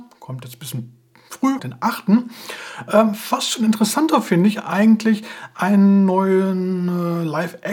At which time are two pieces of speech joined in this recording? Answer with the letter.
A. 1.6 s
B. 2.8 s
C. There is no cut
A